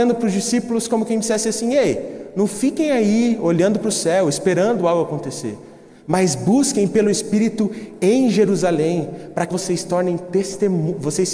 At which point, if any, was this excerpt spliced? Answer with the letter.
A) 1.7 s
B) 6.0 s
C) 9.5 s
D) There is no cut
C